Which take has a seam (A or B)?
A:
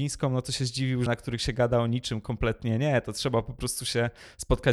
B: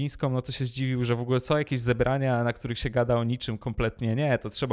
A